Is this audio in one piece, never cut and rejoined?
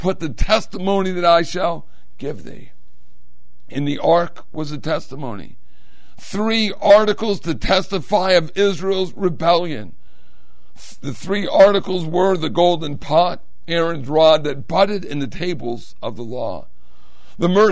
yes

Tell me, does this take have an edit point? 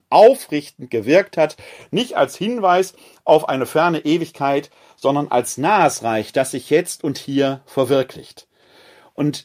no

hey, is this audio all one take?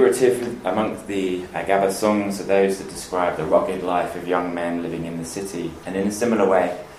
no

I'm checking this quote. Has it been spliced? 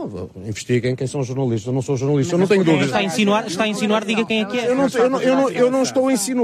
no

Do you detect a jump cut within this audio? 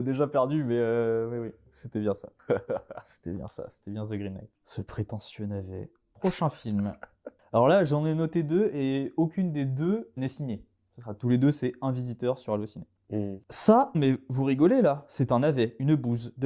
yes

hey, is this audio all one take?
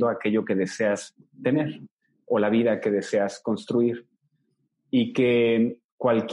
yes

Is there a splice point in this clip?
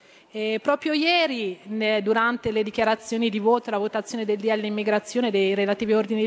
no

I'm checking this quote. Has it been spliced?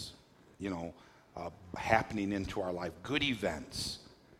yes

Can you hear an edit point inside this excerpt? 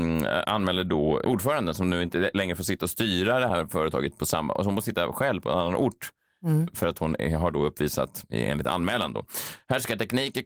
no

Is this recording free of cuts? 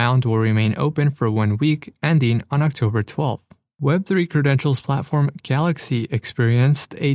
yes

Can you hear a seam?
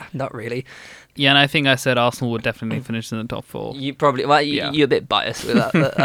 yes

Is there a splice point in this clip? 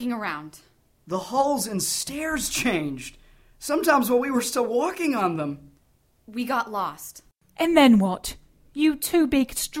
no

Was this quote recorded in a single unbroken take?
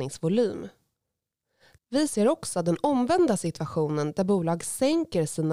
no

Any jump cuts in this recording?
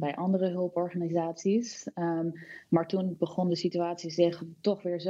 no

